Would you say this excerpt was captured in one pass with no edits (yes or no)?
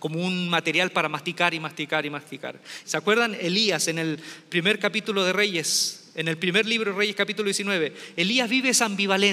no